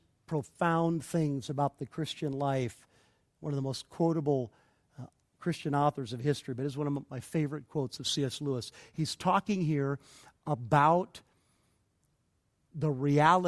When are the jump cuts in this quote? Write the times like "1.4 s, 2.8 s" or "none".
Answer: none